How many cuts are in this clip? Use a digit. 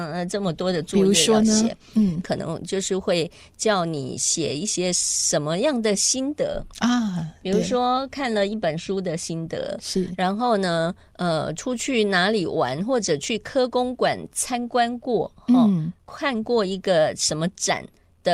1